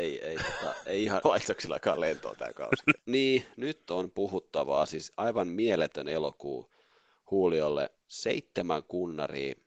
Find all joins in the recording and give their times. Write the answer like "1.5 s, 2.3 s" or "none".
1.2 s, 3.0 s